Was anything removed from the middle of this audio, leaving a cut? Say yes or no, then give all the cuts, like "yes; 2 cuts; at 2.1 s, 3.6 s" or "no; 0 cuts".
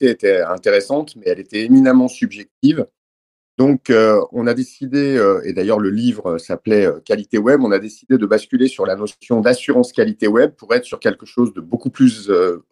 no; 0 cuts